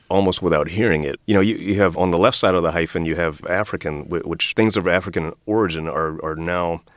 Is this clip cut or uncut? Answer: cut